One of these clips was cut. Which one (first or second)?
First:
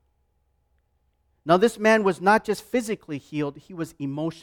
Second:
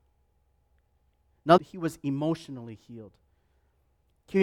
second